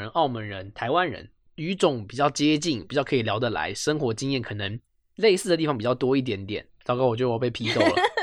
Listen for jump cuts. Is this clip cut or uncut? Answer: cut